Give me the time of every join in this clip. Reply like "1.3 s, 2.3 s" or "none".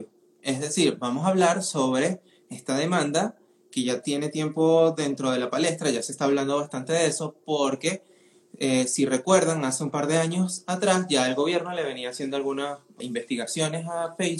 13.0 s